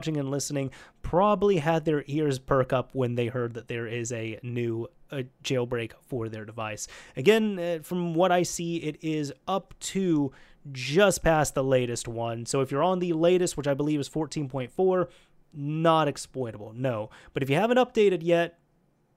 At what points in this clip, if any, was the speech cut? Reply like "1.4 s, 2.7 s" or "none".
none